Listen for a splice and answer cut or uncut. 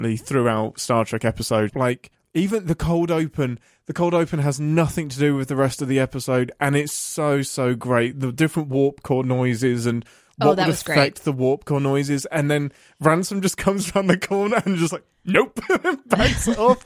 cut